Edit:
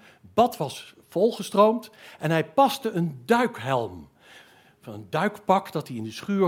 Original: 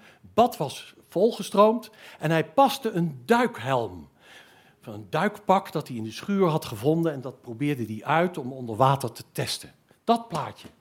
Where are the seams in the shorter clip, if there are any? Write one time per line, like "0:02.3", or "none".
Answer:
none